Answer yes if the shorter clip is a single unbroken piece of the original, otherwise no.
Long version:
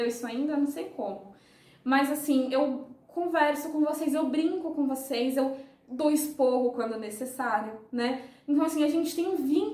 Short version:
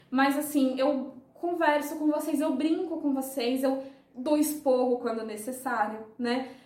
yes